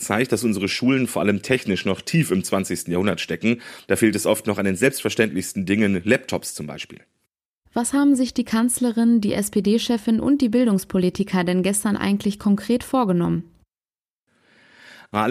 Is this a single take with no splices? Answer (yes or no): yes